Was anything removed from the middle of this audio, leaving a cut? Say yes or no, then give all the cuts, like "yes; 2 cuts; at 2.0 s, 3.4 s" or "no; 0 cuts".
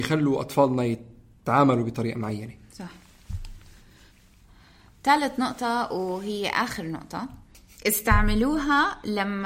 no; 0 cuts